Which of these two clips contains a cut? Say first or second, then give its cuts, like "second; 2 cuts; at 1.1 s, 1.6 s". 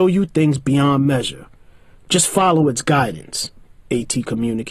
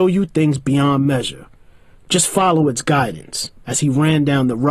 second; 1 cut; at 3.6 s